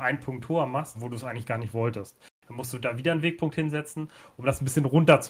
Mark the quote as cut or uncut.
cut